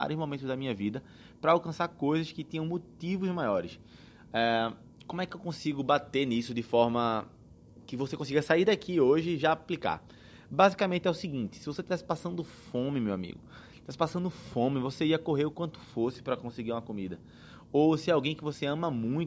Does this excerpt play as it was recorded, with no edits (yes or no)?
yes